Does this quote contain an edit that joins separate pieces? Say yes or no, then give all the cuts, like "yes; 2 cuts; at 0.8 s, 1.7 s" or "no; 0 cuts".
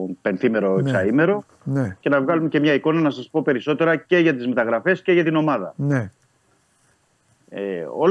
no; 0 cuts